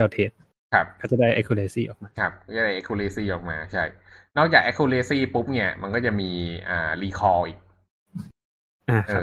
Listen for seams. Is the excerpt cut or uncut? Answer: uncut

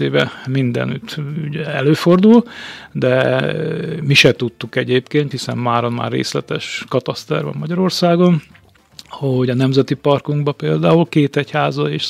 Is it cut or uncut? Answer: cut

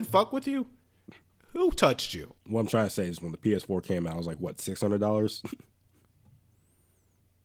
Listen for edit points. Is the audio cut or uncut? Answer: cut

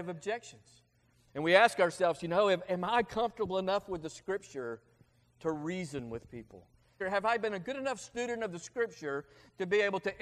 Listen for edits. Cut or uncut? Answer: cut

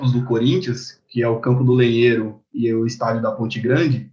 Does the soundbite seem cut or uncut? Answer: uncut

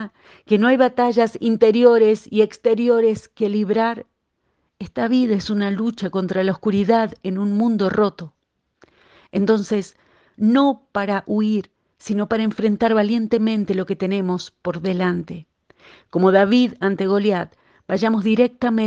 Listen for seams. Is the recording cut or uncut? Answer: cut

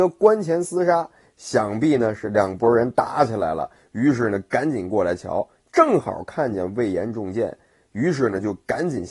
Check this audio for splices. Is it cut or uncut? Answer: uncut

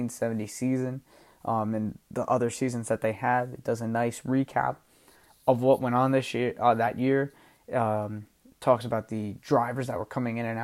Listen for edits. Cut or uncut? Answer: uncut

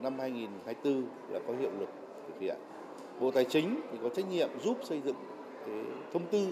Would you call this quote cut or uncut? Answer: uncut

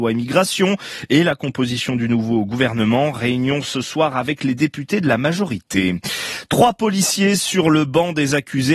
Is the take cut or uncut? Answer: uncut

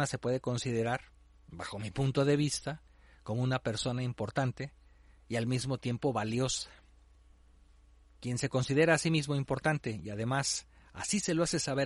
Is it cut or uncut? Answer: uncut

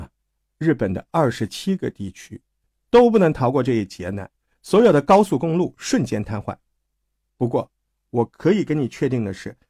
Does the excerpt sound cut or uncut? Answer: cut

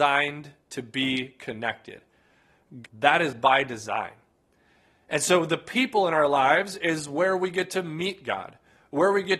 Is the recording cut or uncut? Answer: cut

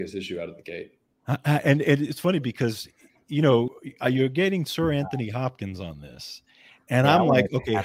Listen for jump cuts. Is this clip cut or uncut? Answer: uncut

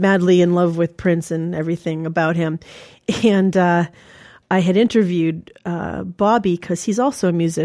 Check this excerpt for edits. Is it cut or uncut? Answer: uncut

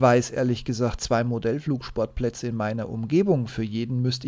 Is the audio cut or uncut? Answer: uncut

